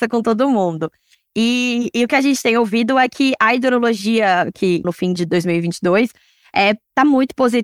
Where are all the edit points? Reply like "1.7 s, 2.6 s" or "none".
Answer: 4.8 s